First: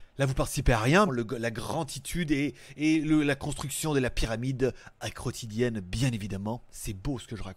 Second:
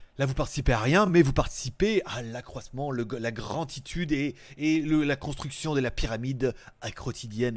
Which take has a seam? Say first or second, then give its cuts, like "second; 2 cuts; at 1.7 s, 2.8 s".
first; 1 cut; at 1.1 s